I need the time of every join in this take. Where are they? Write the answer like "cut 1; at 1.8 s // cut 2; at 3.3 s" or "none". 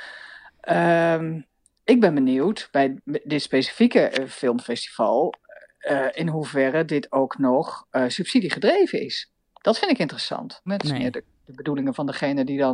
cut 1; at 10.7 s